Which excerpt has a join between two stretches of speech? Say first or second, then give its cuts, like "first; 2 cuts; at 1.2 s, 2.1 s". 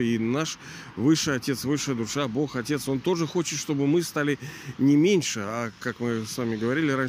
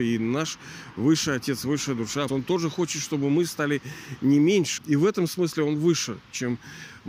second; 2 cuts; at 2.3 s, 4.8 s